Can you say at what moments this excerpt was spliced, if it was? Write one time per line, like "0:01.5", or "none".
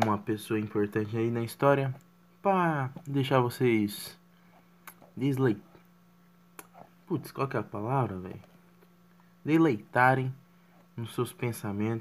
0:05.0